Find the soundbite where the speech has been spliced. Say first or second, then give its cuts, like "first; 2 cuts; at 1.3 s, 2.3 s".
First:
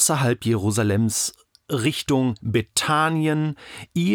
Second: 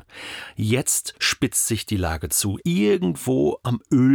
second; 1 cut; at 2.6 s